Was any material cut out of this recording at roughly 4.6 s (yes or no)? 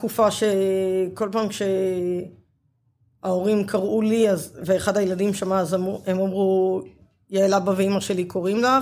yes